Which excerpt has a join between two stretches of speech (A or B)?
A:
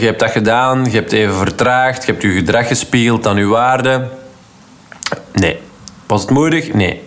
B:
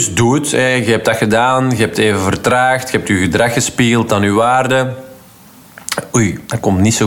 A